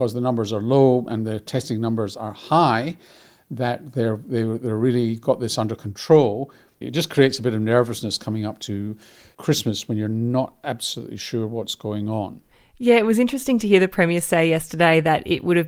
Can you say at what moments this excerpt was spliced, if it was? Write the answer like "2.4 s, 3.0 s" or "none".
6.8 s